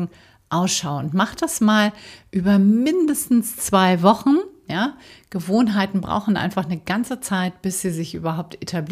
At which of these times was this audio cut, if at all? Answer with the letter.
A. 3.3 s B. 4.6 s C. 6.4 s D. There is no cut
D